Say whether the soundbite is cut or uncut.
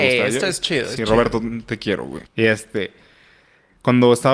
cut